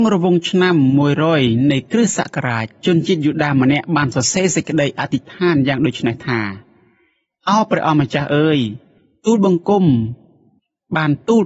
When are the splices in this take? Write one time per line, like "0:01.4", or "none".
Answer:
none